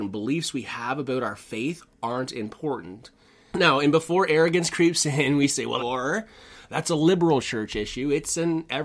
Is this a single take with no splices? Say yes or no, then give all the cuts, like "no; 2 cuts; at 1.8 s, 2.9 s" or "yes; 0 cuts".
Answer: no; 2 cuts; at 3.5 s, 5.8 s